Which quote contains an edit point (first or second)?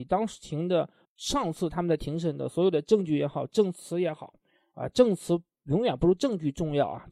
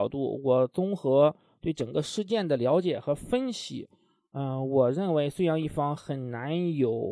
first